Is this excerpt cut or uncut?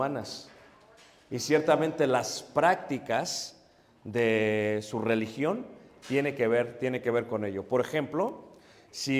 uncut